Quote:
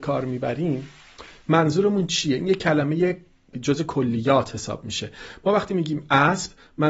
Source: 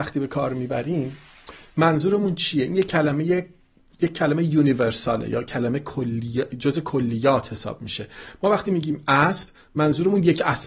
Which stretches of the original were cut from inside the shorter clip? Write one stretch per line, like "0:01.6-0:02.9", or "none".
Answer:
0:03.8-0:06.5